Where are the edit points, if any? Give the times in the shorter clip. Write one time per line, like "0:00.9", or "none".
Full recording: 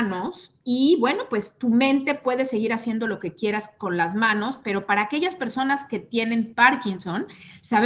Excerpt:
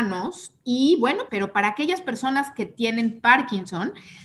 0:01.3